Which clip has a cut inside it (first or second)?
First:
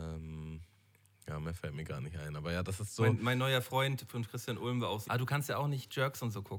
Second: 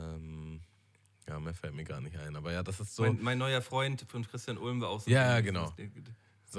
first